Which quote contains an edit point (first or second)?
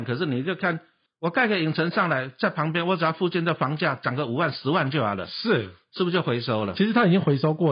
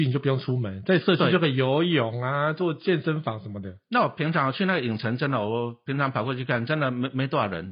first